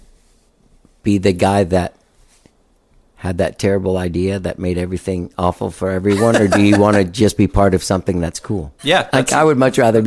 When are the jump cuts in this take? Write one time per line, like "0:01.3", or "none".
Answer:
0:08.8